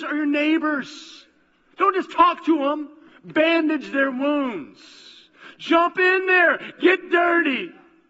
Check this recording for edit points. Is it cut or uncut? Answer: uncut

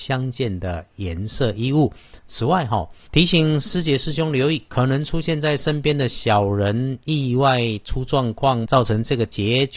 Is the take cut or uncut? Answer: cut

